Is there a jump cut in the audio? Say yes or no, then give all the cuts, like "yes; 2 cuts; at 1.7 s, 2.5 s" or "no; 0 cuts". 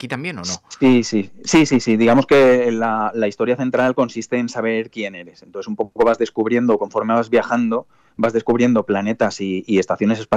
no; 0 cuts